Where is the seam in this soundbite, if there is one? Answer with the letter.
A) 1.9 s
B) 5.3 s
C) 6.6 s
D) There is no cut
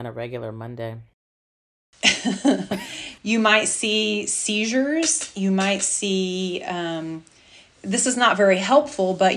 D